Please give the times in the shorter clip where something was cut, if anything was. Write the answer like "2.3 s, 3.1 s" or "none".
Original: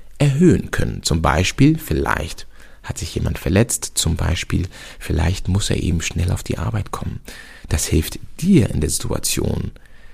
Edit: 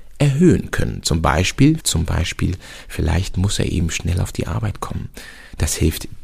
1.8 s